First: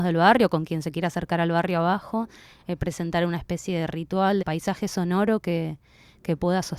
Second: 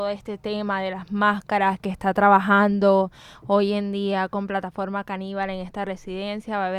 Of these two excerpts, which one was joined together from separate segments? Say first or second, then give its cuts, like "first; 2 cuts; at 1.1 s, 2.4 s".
first; 1 cut; at 4.4 s